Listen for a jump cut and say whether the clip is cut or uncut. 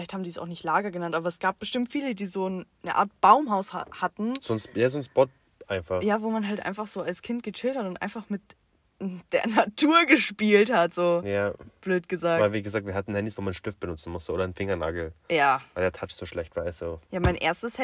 uncut